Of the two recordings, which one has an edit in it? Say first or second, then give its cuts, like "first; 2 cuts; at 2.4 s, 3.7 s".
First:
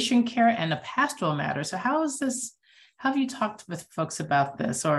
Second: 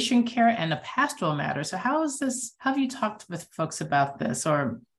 second; 1 cut; at 2.6 s